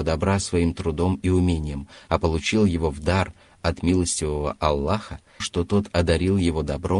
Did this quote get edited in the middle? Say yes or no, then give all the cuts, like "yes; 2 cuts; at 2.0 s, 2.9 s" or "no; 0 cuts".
yes; 1 cut; at 5.4 s